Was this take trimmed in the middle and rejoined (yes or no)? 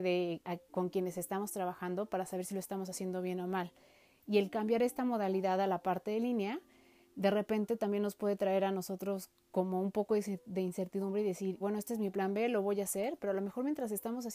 yes